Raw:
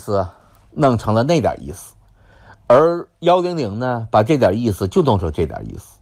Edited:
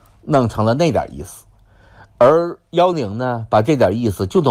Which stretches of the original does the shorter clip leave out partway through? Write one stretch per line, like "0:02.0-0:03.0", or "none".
0:03.4-0:03.5